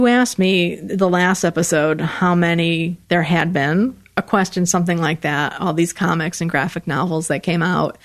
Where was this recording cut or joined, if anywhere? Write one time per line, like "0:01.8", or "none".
none